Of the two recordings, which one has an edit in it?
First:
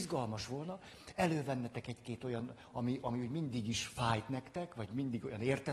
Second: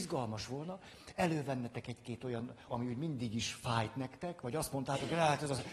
second; 2 cuts; at 2.7 s, 4.4 s

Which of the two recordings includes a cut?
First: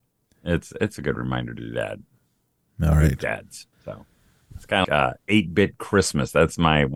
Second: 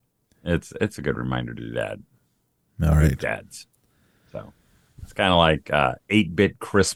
first; 2 cuts; at 3.7 s, 4.8 s

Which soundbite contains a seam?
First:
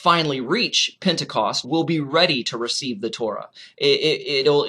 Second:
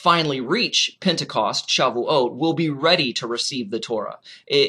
first; 1 cut; at 1.6 s

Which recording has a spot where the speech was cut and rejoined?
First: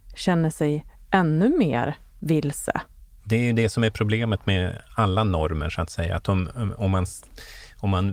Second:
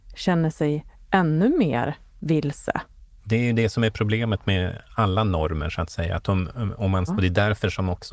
second; 1 cut; at 7.1 s

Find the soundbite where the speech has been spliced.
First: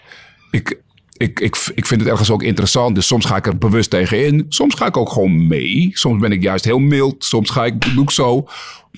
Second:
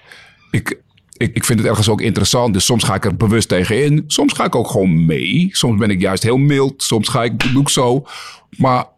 second; 1 cut; at 1.3 s

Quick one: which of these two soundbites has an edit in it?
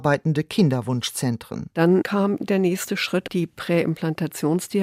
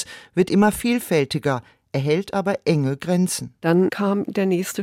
first; 1 cut; at 1.7 s

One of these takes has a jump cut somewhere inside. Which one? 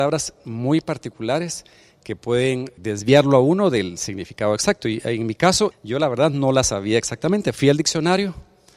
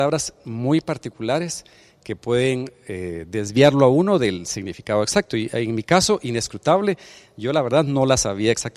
first; 2 cuts; at 2.8 s, 5.7 s

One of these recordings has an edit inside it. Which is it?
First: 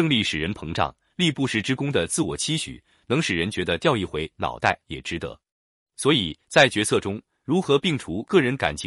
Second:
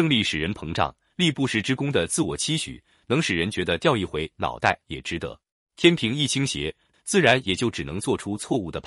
second; 2 cuts; at 5.6 s, 6.9 s

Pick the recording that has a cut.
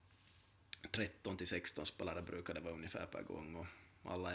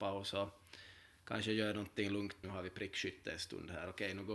second; 1 cut; at 2.4 s

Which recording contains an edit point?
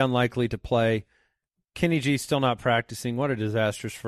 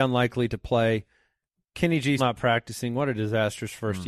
second; 1 cut; at 2.2 s

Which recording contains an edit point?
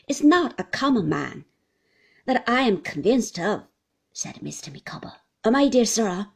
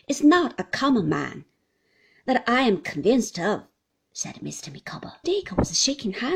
second; 1 cut; at 5.2 s

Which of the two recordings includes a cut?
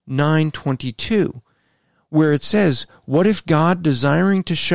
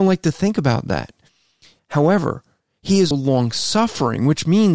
second; 2 cuts; at 1.8 s, 3.1 s

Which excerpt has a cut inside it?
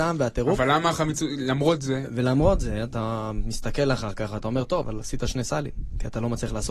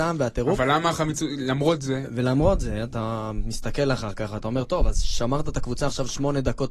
first; 1 cut; at 4.8 s

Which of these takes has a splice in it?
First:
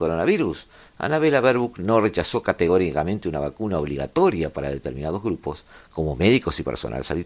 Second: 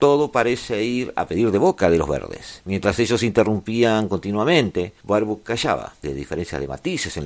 second; 2 cuts; at 2.6 s, 6.0 s

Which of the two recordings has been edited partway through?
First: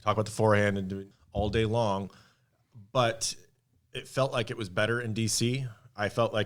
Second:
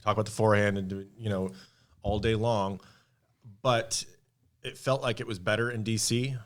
first; 1 cut; at 1.1 s

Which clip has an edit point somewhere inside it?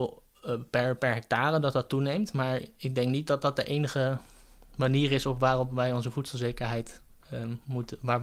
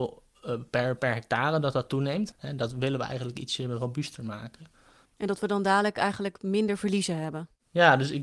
second; 2 cuts; at 2.3 s, 5.1 s

